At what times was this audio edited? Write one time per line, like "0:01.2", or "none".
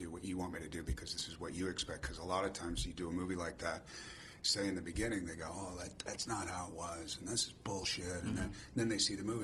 0:04.4